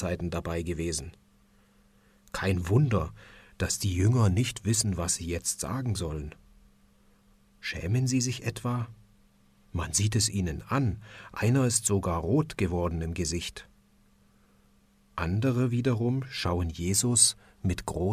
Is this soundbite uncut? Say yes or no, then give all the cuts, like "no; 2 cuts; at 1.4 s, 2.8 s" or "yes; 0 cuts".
yes; 0 cuts